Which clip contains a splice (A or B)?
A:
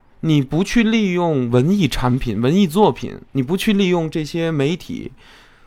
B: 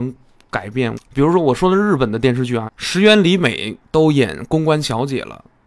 B